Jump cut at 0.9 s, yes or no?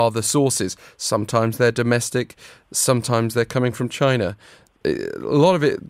no